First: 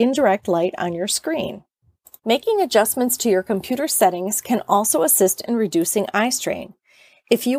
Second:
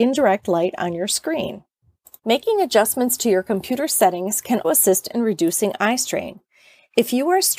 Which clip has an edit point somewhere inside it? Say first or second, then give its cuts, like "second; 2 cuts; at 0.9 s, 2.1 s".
second; 1 cut; at 4.6 s